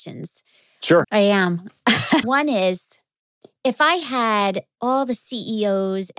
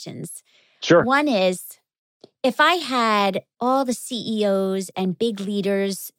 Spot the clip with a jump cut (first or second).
first